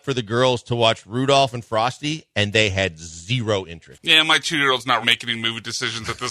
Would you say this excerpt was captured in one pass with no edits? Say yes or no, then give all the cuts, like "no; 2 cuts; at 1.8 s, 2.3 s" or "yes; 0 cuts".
no; 2 cuts; at 3.9 s, 5.0 s